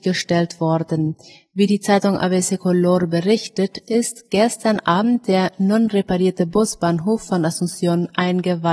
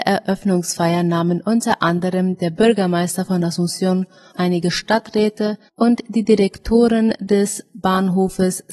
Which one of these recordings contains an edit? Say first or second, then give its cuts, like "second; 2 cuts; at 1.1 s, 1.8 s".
second; 2 cuts; at 4.3 s, 5.7 s